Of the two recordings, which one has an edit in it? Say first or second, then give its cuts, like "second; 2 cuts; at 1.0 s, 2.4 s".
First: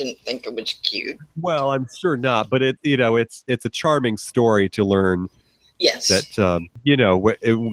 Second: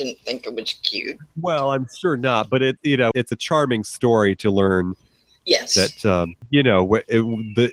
second; 1 cut; at 3.1 s